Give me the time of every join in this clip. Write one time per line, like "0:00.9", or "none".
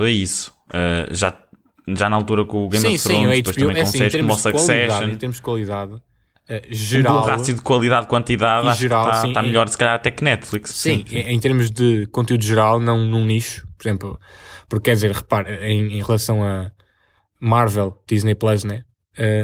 none